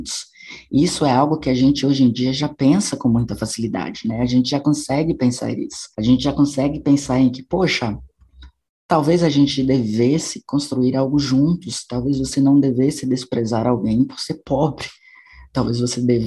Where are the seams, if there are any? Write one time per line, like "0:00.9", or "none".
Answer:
0:05.9